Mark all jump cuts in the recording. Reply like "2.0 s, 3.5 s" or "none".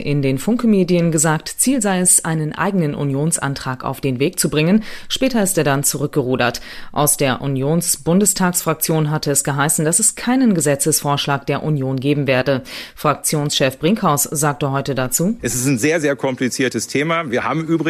none